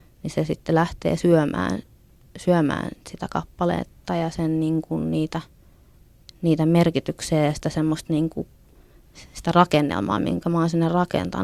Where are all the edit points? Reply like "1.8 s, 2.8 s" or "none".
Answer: none